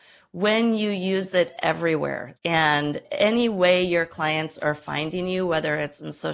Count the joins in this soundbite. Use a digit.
1